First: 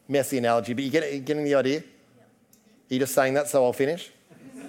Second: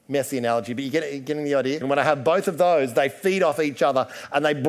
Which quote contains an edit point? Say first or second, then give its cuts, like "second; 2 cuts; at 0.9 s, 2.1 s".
second; 1 cut; at 1.8 s